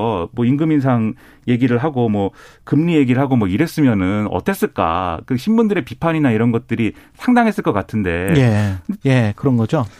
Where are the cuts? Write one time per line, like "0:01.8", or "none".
0:09.0